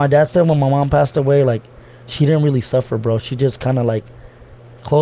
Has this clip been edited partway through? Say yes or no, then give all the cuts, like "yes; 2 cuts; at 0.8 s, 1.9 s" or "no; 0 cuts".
no; 0 cuts